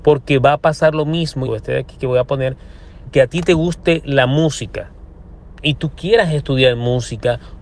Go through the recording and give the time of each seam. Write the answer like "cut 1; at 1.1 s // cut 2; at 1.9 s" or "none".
cut 1; at 1.5 s // cut 2; at 3.1 s